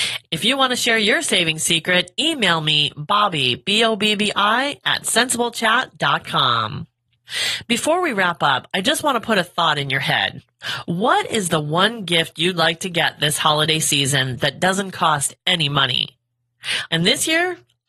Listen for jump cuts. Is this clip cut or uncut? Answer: cut